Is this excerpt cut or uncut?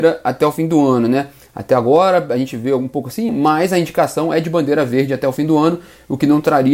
cut